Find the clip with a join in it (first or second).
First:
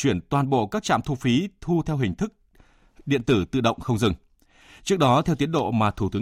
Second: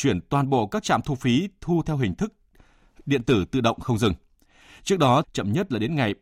second